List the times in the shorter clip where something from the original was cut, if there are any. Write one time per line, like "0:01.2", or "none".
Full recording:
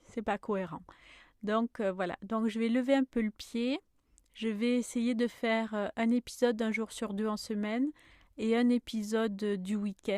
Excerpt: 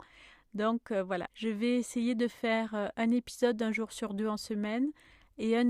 0:01.3

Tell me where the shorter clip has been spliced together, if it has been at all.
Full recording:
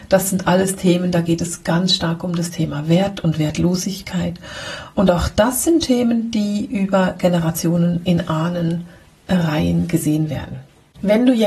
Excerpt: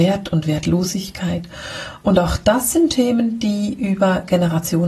none

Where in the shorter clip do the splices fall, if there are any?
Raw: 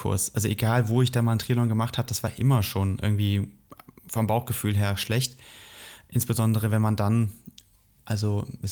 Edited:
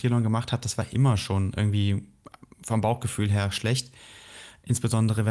none

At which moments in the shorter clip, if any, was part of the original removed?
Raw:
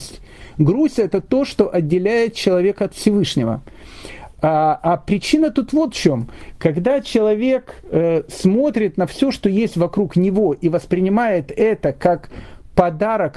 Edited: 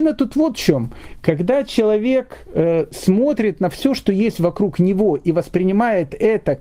none

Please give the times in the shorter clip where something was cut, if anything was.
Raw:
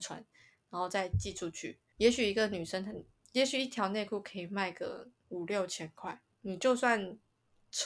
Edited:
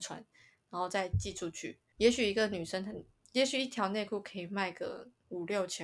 none

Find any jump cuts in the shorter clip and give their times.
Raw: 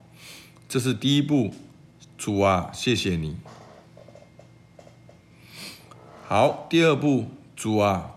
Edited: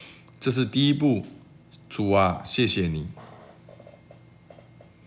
none

